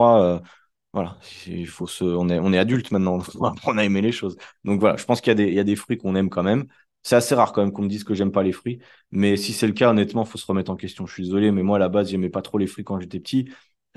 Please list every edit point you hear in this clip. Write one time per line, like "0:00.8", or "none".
none